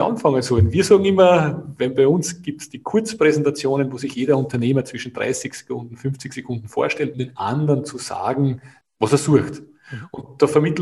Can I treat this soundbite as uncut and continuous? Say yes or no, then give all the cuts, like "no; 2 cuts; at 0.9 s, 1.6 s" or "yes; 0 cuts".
no; 2 cuts; at 7.1 s, 8.8 s